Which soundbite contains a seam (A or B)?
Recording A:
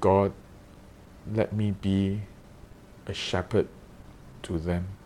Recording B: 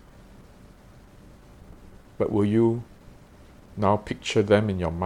A